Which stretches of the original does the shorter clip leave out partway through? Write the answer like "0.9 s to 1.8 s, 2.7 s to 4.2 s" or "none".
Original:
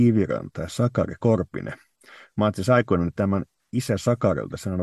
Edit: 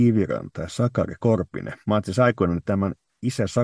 1.8 s to 2.3 s